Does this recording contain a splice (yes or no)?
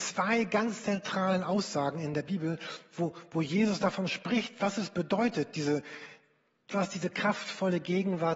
no